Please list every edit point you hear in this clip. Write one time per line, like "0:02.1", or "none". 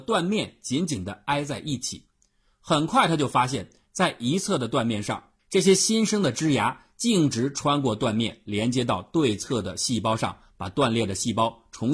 0:05.4